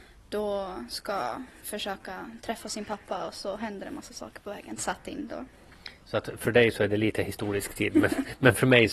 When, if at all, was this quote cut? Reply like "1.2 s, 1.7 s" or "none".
4.8 s